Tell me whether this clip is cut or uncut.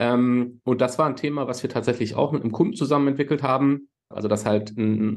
cut